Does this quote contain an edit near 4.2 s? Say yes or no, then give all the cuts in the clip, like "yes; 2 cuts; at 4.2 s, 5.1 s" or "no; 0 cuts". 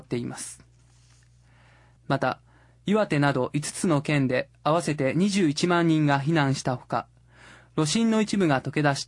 no; 1 cut; at 2.0 s